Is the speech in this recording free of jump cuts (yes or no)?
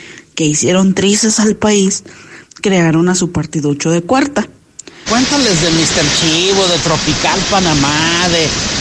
no